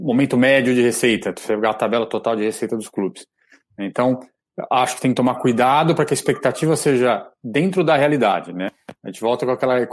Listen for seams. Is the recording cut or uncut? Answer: uncut